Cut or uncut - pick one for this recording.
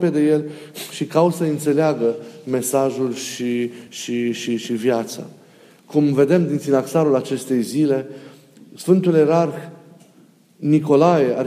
uncut